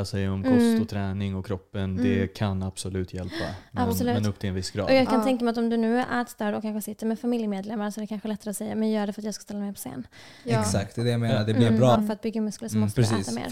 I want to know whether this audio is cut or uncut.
cut